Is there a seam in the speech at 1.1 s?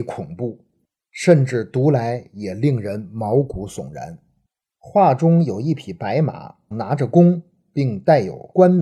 no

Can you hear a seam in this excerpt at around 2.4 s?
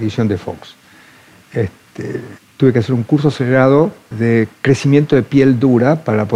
yes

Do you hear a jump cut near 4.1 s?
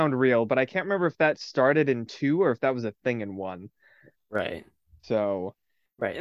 yes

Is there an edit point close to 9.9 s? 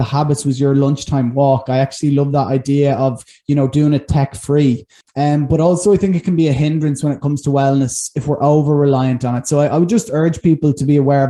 no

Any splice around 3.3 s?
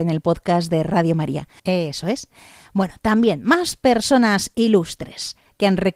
no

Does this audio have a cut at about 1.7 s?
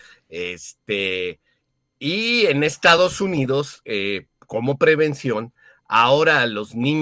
no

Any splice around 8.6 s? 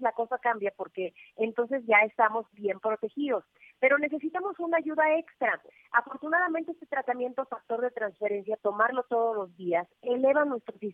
no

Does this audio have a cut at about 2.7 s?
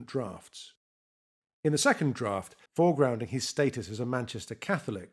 yes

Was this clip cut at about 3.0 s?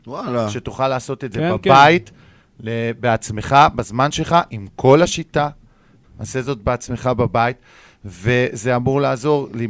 no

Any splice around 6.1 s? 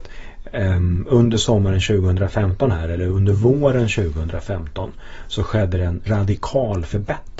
yes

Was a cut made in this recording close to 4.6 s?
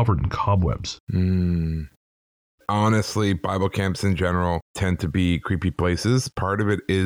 yes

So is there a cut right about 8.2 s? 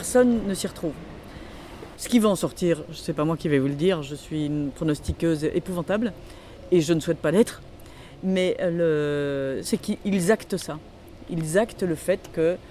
no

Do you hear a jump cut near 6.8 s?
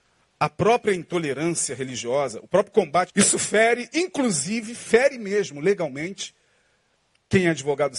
no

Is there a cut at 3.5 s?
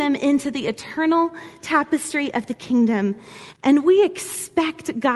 yes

